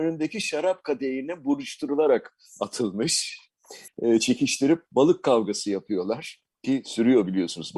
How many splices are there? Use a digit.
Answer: 1